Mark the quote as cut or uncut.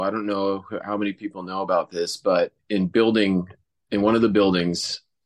uncut